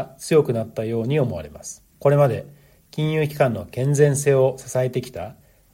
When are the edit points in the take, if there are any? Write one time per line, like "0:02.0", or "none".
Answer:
0:01.9